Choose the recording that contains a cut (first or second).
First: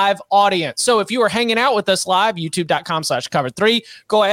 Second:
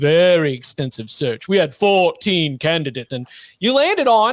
second